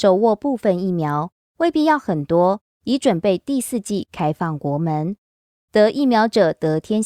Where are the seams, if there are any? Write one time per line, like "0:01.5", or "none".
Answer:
0:02.7
0:05.6

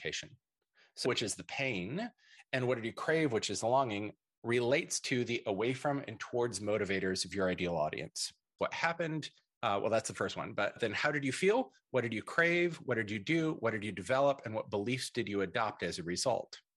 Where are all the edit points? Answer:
0:01.1
0:08.6

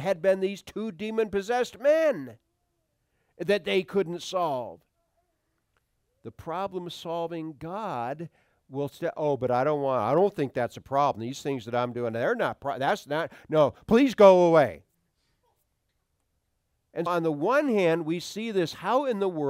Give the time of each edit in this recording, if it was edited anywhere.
0:17.1

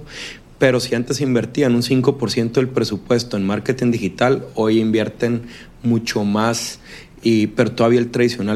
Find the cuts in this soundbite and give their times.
none

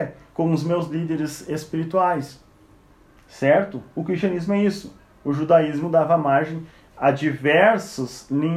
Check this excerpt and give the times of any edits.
none

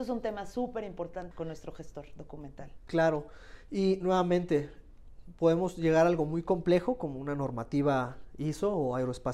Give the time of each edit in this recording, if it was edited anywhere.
0:01.3

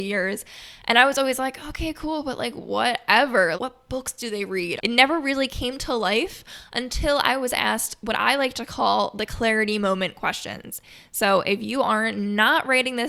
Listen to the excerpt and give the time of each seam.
0:03.5
0:04.8

